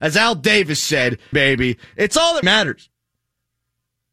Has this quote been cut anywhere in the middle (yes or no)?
yes